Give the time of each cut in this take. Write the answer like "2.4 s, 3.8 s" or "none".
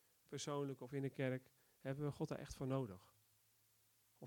none